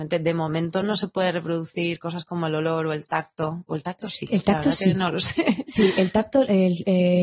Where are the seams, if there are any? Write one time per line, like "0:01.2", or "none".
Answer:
none